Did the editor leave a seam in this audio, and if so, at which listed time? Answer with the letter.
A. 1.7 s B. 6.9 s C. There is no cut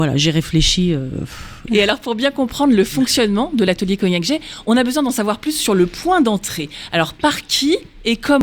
A